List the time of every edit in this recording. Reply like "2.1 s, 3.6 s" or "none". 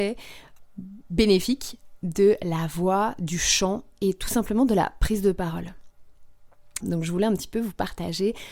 6.8 s